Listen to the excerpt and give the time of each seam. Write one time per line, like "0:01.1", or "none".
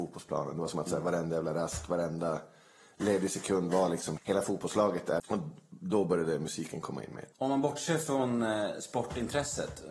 0:04.2
0:05.2
0:07.3

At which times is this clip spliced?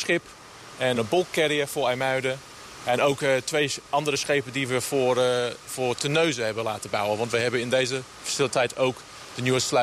0:00.9

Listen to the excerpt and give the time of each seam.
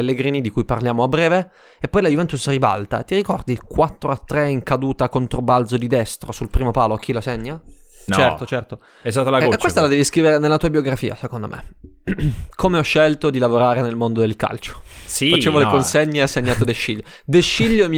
0:08.1

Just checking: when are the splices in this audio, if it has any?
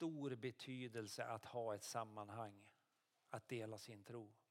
none

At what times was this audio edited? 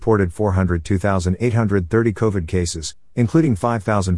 none

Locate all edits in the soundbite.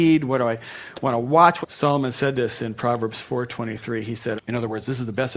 0:01.6
0:04.4

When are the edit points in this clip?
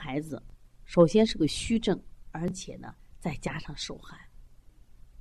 none

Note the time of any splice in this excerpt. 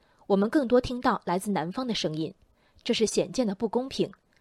none

